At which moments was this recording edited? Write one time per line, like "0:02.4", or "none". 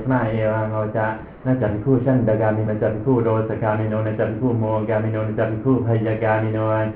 0:02.7